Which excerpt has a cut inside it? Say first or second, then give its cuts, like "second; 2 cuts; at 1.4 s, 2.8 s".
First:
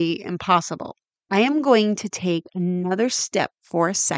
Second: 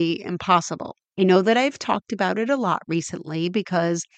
second; 1 cut; at 1.1 s